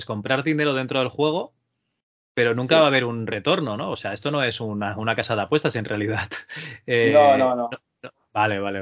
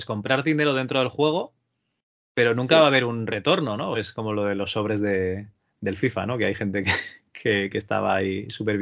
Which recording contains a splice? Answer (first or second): second